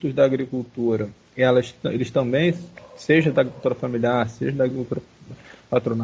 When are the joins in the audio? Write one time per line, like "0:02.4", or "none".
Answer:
none

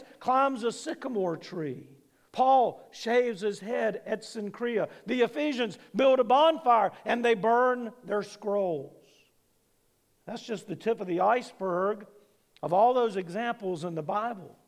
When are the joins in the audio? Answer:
none

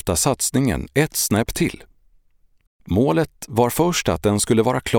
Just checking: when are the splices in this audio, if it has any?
0:02.7

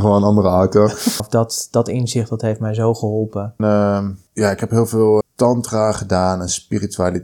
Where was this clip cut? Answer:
0:01.2
0:03.6
0:05.2

